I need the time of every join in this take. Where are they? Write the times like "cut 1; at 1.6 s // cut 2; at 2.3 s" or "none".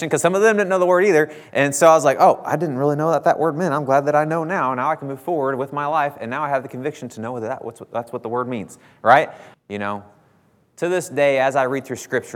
cut 1; at 9.5 s